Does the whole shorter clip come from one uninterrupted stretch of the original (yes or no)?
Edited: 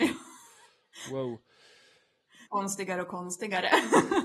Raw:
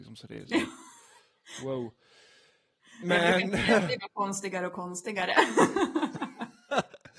no